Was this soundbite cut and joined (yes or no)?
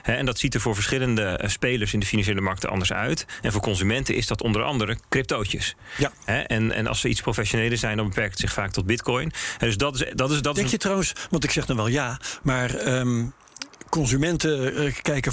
no